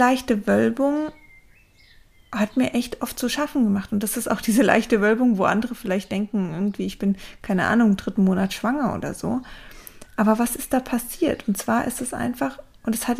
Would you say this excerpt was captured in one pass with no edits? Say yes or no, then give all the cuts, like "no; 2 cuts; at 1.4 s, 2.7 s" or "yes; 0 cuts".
yes; 0 cuts